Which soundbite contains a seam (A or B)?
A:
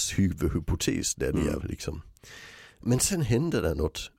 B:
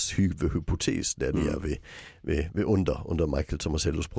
A